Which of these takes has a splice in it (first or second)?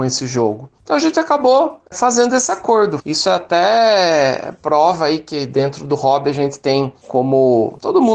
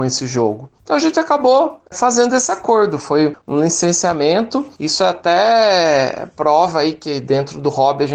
first